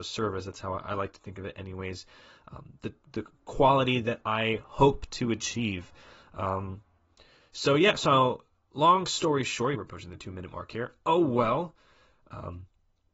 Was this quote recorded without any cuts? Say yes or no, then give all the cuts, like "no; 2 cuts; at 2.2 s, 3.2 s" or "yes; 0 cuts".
no; 1 cut; at 9.7 s